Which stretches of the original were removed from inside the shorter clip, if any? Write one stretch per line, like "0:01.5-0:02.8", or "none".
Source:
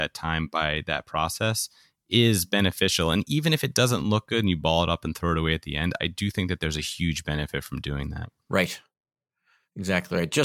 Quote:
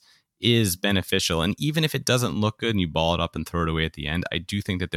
none